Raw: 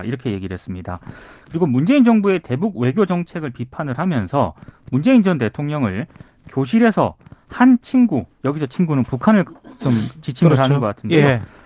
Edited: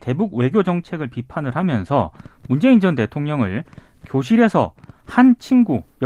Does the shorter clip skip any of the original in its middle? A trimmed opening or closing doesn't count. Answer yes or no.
no